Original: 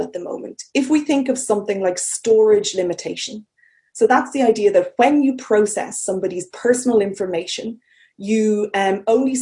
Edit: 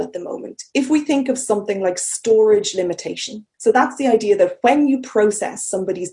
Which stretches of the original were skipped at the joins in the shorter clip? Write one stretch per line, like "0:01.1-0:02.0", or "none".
0:03.5-0:03.9